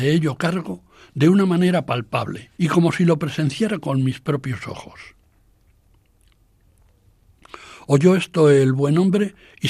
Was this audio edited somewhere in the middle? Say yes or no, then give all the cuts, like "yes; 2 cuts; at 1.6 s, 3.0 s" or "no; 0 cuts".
yes; 1 cut; at 2.5 s